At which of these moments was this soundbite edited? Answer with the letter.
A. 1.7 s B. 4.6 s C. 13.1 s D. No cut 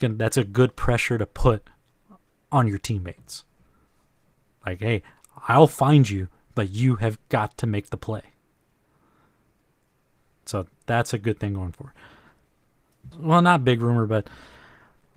C